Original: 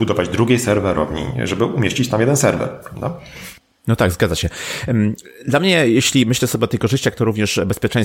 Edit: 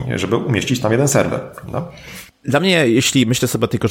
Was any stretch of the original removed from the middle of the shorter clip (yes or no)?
yes